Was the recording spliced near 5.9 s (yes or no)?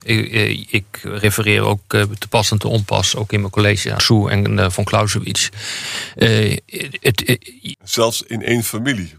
no